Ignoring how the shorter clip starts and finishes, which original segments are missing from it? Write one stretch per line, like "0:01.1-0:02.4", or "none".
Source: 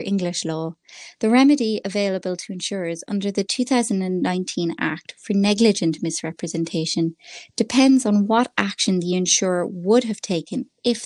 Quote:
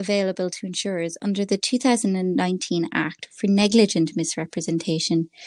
none